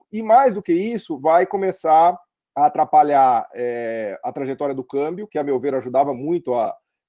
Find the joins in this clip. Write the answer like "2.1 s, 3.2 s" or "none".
none